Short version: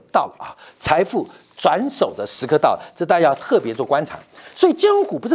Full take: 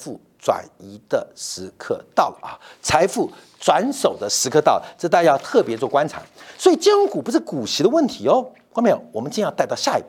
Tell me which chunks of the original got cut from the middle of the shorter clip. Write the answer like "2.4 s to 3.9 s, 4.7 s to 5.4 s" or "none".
none